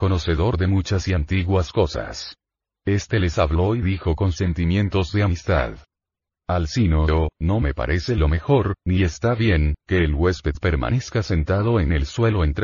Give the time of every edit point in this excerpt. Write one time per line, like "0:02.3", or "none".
none